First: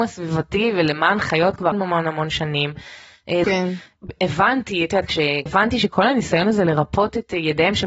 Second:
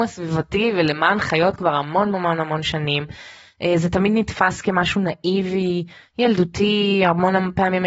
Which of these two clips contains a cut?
first; 3 cuts; at 1.7 s, 3.4 s, 5.5 s

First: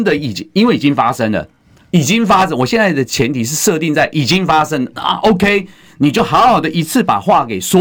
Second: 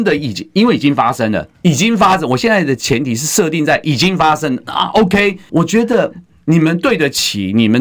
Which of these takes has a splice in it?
second; 2 cuts; at 1.5 s, 5.5 s

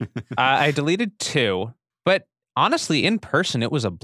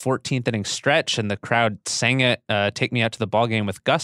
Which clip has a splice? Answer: first; 1 cut; at 1.9 s

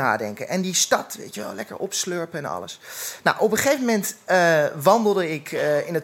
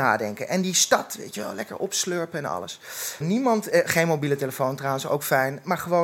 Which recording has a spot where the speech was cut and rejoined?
second; 1 cut; at 3.2 s

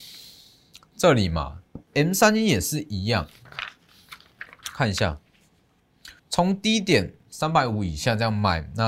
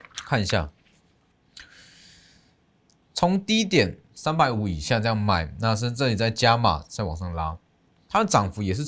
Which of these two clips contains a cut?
first; 2 cuts; at 1.8 s, 6.2 s

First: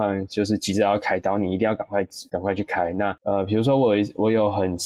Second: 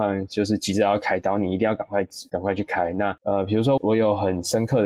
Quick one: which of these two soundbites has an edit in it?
second; 1 cut; at 3.8 s

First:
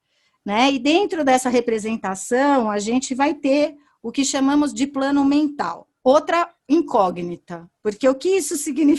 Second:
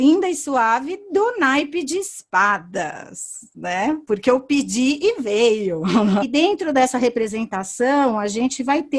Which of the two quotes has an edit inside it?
second; 1 cut; at 6.2 s

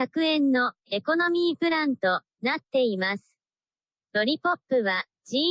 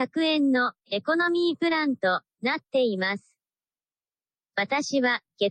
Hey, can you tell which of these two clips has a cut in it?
first; 1 cut; at 4.0 s

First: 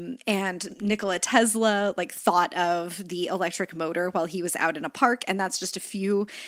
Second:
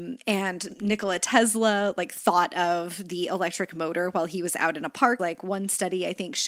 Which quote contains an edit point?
second; 1 cut; at 5.2 s

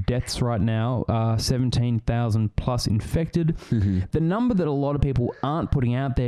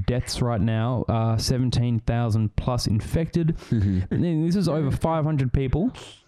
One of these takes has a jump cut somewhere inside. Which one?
second; 1 cut; at 4.1 s

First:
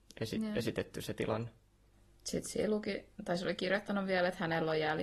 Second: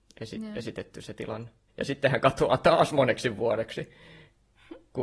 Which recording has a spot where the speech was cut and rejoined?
second; 1 cut; at 1.7 s

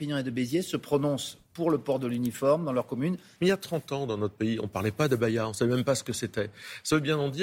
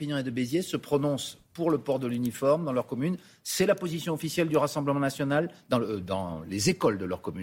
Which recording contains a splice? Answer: first; 1 cut; at 3.4 s

